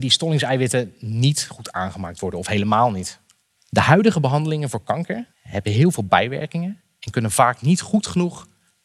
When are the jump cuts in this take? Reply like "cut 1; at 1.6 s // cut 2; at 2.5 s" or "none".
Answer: cut 1; at 3.6 s // cut 2; at 5.3 s